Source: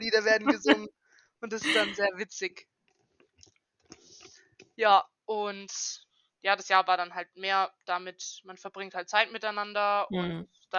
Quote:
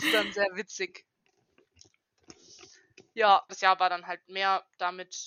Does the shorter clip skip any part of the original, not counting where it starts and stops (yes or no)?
yes